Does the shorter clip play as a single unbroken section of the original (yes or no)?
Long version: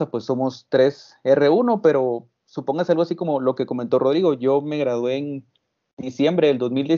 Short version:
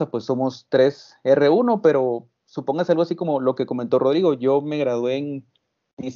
yes